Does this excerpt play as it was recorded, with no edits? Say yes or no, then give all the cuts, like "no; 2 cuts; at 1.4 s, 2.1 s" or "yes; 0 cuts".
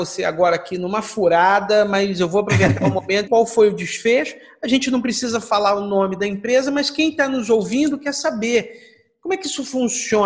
no; 1 cut; at 3.3 s